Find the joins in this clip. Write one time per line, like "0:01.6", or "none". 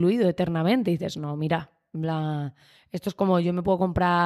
none